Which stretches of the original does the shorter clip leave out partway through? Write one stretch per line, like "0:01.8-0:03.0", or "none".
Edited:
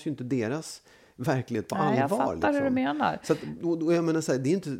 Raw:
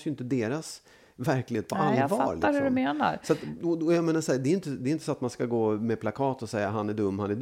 none